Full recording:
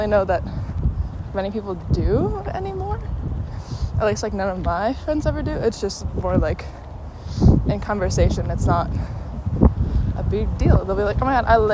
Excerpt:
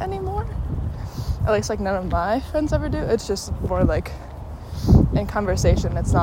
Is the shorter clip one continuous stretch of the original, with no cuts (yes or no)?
yes